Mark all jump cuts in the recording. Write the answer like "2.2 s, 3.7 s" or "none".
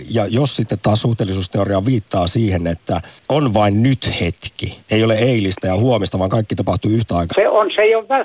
4.8 s, 7.3 s